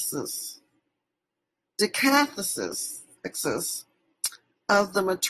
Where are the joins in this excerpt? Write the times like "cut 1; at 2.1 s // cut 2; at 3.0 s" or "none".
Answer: none